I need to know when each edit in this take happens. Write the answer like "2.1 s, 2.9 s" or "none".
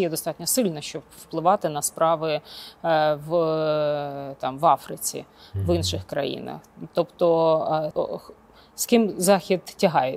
7.9 s